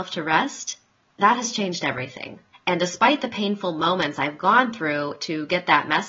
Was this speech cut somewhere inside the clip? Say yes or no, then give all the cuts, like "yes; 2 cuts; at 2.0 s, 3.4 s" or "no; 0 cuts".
yes; 1 cut; at 2.5 s